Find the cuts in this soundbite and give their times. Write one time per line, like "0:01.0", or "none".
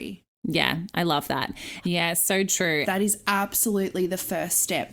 0:01.8
0:02.8